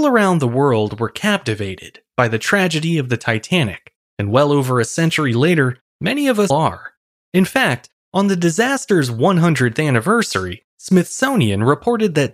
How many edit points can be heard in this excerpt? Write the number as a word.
one